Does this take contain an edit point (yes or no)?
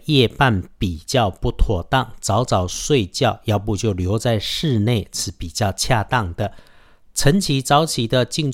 no